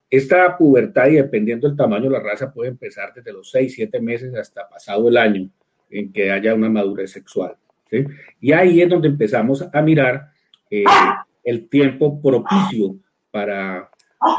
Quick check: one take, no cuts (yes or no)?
yes